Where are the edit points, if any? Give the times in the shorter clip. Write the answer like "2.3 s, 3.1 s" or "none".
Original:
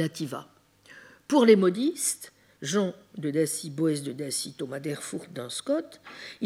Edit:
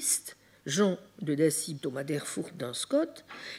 1.8 s